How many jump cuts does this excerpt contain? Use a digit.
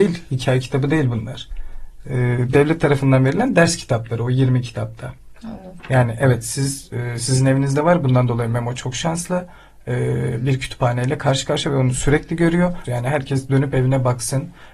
2